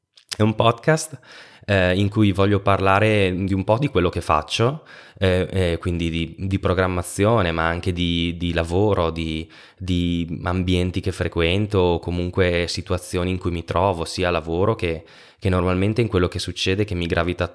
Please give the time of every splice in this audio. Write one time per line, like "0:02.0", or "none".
none